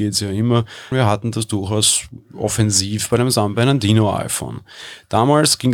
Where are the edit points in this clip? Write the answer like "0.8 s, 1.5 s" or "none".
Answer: 0.9 s